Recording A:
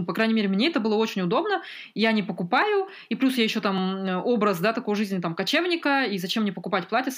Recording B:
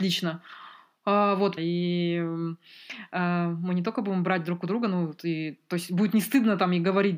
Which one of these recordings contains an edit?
B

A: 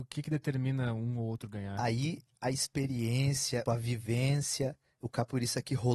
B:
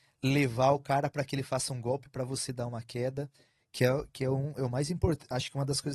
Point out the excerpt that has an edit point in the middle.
A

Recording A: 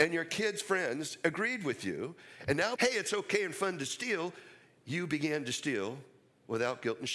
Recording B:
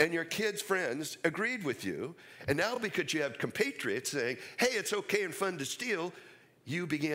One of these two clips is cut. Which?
A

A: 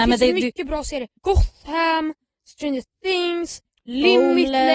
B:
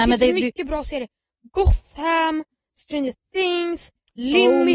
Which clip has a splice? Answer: A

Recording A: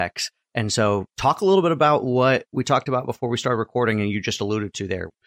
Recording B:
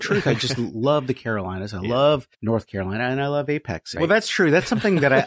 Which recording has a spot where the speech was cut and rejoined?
B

